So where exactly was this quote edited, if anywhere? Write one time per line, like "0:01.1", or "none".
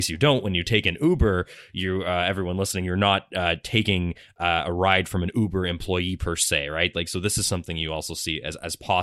0:06.9